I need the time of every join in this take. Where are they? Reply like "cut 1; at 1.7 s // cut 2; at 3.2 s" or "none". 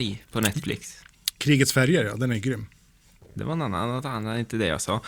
none